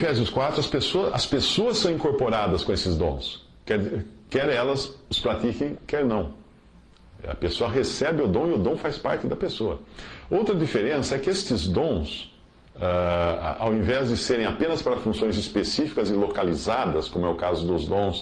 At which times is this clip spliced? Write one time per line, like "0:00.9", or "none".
none